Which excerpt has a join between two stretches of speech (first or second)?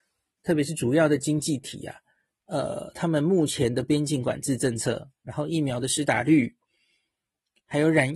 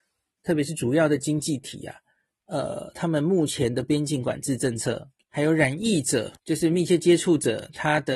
second